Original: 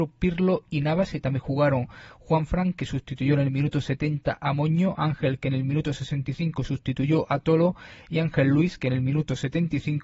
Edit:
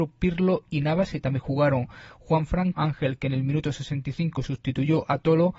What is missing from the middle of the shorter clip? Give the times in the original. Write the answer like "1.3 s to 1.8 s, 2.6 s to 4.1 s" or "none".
2.7 s to 5.0 s